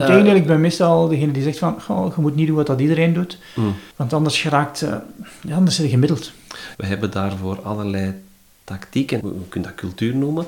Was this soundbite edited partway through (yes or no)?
yes